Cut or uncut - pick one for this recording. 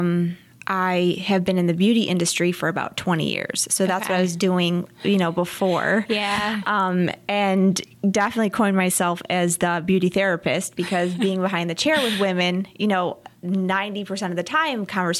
uncut